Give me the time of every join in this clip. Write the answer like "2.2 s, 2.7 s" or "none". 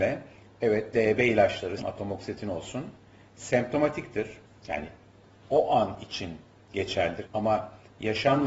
1.8 s, 7.2 s